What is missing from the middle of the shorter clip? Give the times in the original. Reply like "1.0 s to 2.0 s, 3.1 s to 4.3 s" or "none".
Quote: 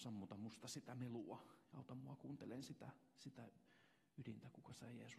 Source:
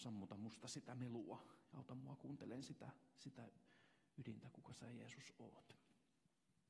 none